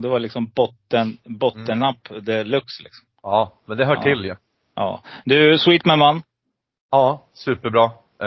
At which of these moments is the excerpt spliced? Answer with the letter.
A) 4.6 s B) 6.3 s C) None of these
C